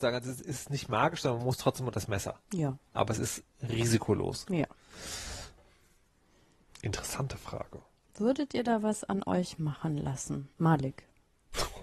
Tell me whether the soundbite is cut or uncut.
cut